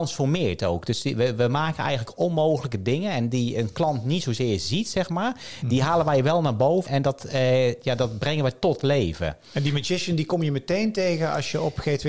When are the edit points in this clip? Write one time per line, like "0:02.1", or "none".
0:06.9

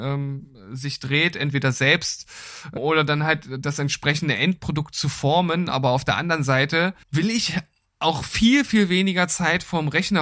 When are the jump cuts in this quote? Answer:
0:02.8
0:07.0

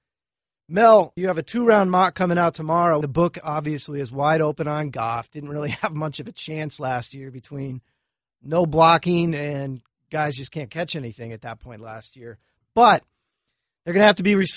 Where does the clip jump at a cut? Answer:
0:03.0

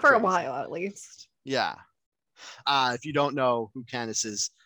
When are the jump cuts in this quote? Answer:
0:02.6

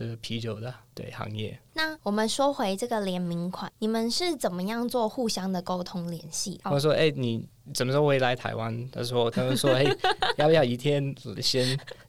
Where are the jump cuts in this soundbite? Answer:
0:06.6
0:09.3

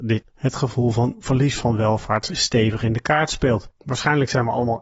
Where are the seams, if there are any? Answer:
none

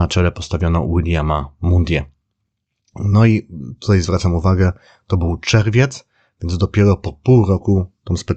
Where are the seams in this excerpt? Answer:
none

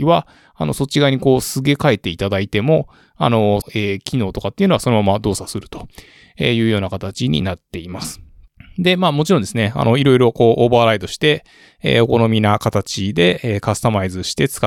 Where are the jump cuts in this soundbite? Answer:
0:03.6

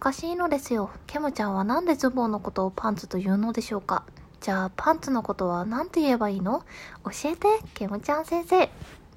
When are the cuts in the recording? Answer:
0:01.0

